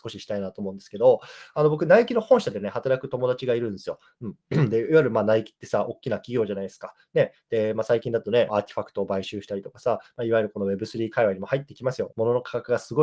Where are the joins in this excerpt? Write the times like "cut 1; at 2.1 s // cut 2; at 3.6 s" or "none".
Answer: cut 1; at 8.5 s // cut 2; at 12.1 s